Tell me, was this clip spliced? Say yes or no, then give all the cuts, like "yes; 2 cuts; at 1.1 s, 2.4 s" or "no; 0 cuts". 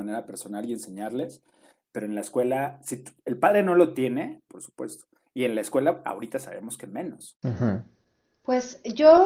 yes; 1 cut; at 4.5 s